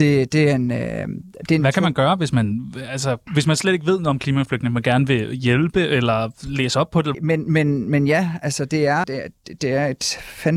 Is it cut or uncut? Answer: cut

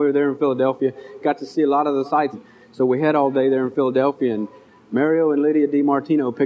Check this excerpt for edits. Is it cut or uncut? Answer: cut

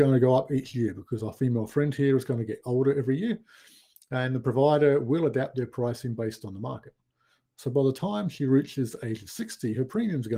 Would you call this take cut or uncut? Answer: uncut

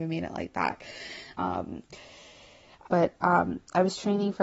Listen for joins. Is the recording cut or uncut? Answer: cut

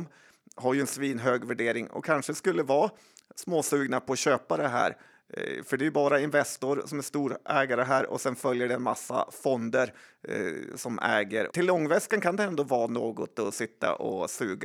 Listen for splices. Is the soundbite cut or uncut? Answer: cut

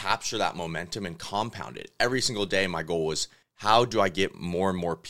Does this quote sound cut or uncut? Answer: uncut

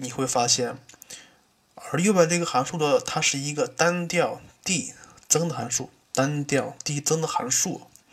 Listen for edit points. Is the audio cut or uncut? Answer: uncut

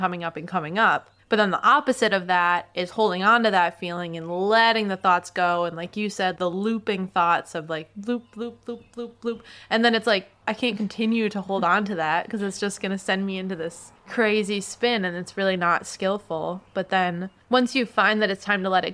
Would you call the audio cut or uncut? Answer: uncut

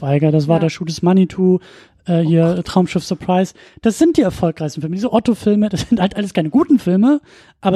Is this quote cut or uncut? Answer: uncut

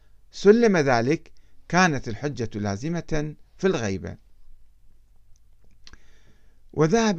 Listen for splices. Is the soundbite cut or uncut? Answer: uncut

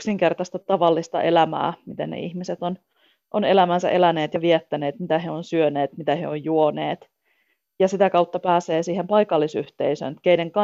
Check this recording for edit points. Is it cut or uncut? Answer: uncut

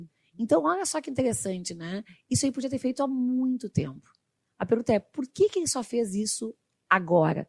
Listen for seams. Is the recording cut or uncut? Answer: uncut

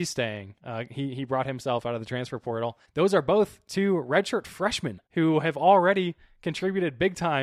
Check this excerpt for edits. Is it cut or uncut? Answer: cut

